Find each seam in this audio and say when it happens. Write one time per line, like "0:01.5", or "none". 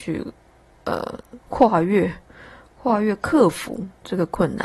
0:01.4